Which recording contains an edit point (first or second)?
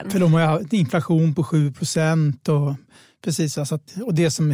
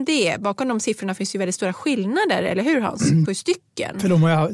second